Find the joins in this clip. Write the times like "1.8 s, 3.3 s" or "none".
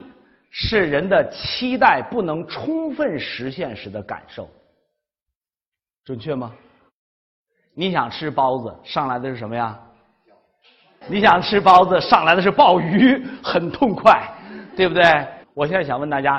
11.0 s, 15.4 s